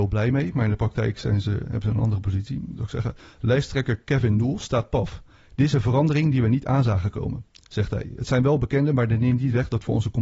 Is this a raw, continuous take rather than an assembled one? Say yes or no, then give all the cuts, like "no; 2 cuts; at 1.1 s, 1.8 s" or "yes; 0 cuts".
yes; 0 cuts